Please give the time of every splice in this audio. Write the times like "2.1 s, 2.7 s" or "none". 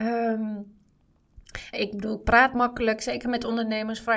1.7 s, 3.0 s